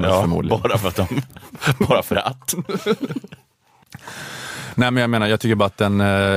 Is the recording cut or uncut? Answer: uncut